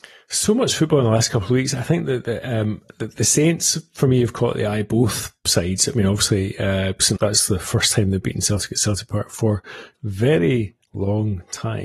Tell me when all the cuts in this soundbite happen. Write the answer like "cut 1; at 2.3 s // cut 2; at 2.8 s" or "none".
cut 1; at 7.2 s // cut 2; at 9.9 s